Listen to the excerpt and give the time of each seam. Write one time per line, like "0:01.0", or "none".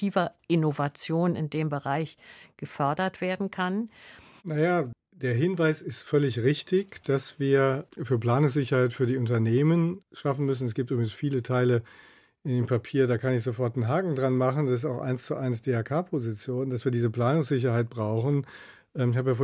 0:04.4

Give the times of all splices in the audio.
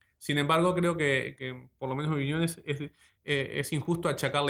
0:01.4

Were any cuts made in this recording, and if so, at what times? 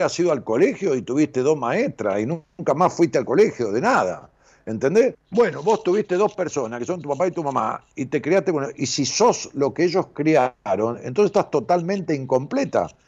0:05.1

